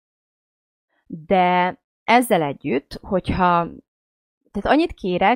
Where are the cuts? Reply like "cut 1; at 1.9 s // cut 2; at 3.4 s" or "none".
none